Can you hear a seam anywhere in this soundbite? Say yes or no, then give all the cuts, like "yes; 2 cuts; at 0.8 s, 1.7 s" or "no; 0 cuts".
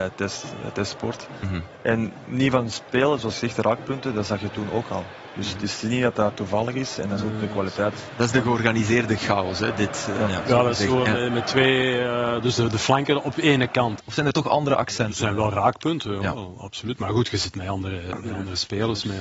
yes; 1 cut; at 14.0 s